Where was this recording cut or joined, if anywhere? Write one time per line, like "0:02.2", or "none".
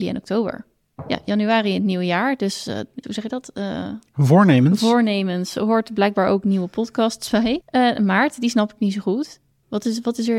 0:03.0